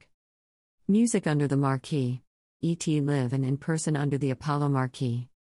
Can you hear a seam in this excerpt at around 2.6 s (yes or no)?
yes